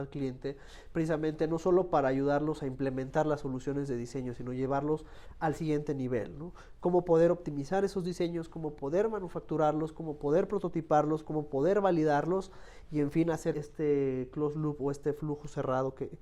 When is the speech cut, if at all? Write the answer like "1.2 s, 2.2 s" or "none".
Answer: 13.5 s